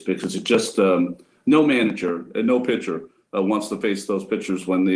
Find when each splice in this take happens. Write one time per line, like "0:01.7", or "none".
none